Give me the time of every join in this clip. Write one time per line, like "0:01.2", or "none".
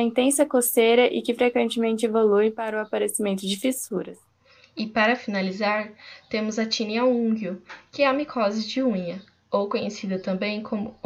none